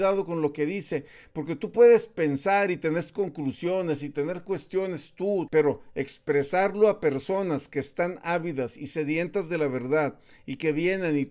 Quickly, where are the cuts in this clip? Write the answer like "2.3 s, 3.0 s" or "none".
5.5 s